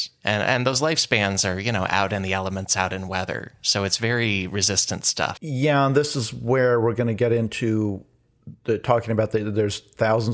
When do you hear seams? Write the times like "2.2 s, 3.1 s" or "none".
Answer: 5.4 s